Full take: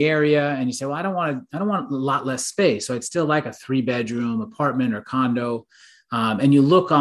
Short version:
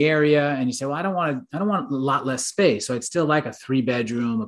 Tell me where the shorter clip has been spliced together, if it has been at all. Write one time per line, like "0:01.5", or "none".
none